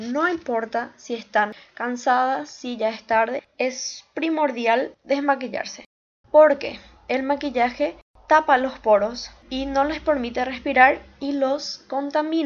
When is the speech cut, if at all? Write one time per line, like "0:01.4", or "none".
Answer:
0:06.2